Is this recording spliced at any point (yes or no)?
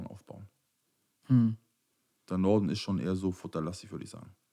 no